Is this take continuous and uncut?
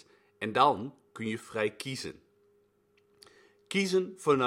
yes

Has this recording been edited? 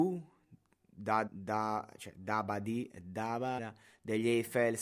yes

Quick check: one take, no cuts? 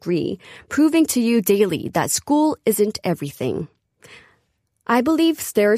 yes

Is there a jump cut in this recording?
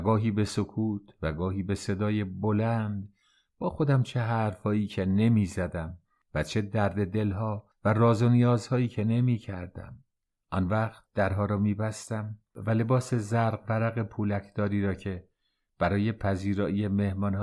yes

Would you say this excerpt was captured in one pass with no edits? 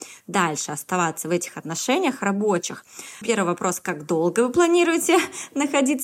no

